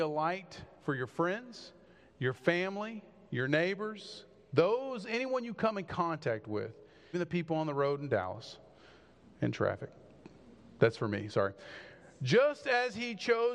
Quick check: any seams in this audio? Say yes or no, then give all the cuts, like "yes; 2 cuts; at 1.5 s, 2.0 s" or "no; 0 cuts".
yes; 1 cut; at 7.1 s